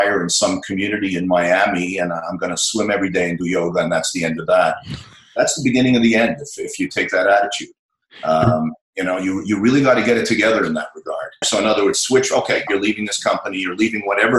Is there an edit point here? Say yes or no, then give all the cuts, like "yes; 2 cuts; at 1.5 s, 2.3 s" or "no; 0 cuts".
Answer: yes; 2 cuts; at 11.4 s, 12.7 s